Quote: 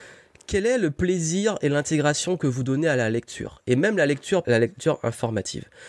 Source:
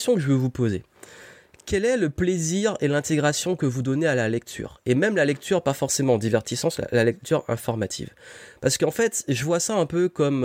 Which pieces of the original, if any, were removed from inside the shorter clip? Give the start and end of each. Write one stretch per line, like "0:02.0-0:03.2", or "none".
0:05.6-0:06.9